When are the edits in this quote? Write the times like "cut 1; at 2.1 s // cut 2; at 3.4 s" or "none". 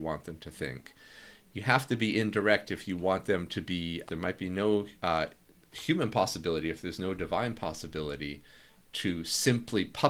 cut 1; at 4.1 s